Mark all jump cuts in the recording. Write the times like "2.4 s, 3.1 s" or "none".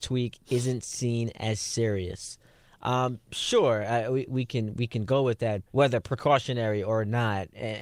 4.2 s, 5.7 s